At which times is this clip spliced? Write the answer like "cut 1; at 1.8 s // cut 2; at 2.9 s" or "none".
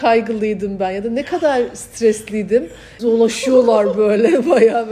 cut 1; at 3.0 s